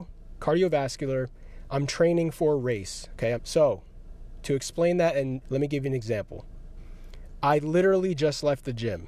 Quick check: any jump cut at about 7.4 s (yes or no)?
no